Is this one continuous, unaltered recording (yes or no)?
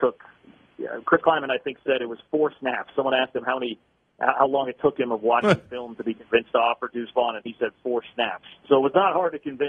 yes